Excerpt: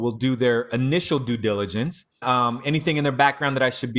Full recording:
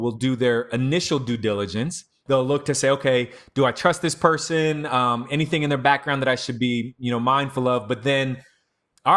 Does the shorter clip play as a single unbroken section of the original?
no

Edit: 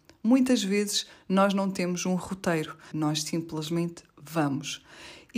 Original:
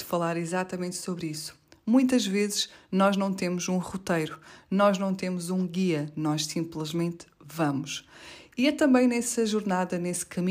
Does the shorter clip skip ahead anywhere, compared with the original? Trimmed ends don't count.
yes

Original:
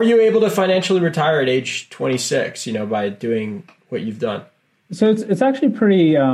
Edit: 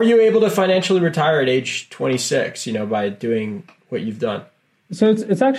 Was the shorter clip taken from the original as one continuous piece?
yes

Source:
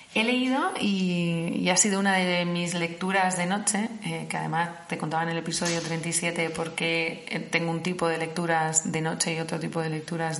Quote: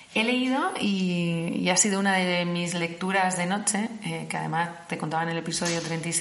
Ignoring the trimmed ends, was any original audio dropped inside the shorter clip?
no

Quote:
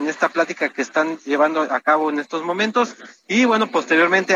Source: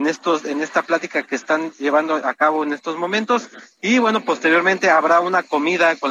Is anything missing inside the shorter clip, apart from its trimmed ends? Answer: no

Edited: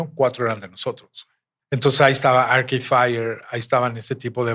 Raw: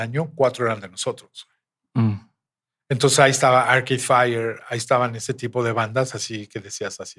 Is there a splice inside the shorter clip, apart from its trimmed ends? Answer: yes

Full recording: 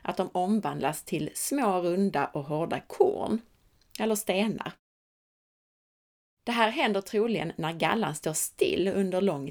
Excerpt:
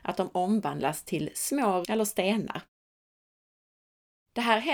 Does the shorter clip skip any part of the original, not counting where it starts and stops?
yes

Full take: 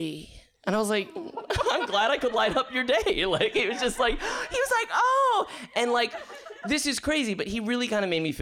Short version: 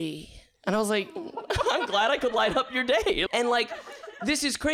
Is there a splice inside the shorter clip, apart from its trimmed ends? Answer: yes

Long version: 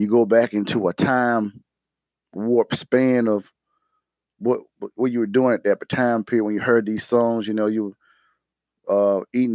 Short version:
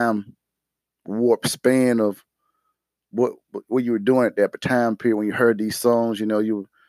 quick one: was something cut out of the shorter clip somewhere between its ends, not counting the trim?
no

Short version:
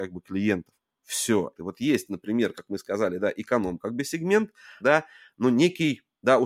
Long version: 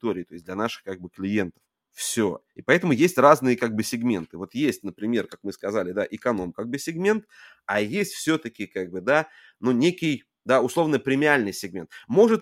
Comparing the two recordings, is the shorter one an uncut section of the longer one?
no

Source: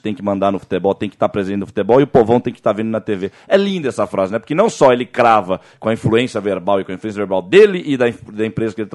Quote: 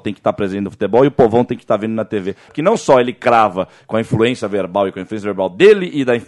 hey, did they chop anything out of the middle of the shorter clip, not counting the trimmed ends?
yes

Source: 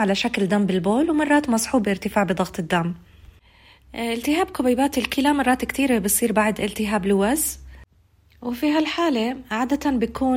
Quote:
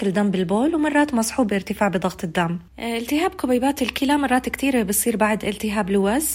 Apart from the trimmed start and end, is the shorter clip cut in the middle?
yes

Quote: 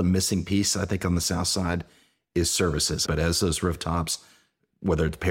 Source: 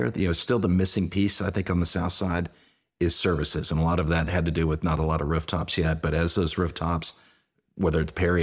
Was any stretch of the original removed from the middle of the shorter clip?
yes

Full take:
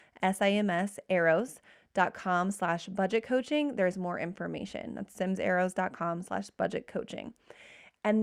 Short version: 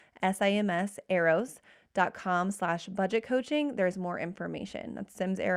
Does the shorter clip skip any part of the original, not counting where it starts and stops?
no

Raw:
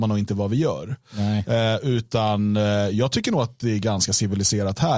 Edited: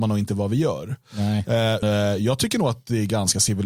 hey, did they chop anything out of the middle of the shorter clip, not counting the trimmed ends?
yes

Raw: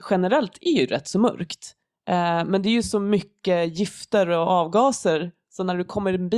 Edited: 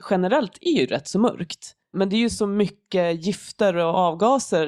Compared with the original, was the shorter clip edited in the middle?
yes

